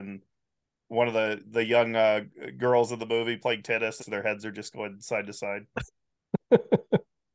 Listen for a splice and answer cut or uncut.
cut